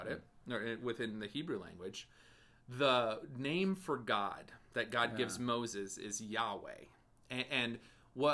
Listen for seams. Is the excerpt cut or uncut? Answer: uncut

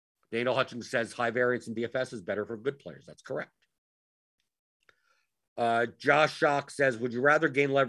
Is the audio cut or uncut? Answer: uncut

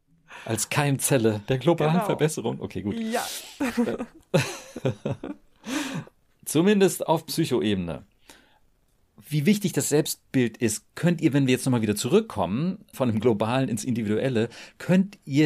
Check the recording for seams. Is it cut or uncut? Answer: cut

